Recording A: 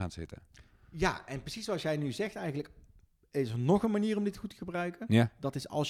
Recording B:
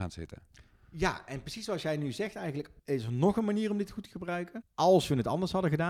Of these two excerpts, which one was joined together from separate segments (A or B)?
B